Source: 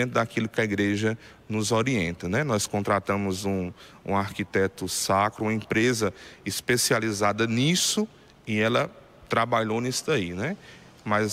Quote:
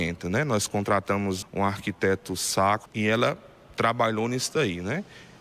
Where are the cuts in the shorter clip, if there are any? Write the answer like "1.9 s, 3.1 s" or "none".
1.4 s, 2.9 s